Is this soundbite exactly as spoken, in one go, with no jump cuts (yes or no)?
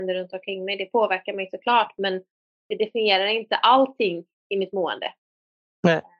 yes